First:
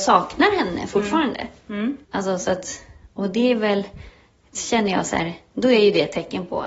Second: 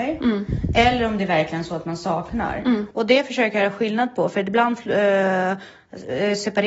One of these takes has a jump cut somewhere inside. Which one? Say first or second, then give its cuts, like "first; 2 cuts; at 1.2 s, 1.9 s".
first; 1 cut; at 2.0 s